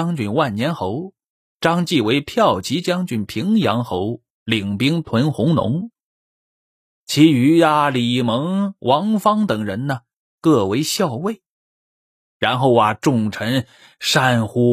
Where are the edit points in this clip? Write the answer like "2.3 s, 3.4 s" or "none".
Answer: none